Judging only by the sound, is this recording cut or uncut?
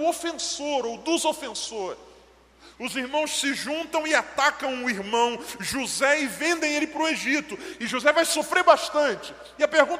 cut